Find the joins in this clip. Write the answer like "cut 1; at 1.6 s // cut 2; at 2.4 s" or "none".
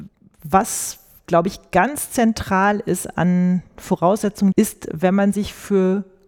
cut 1; at 4.5 s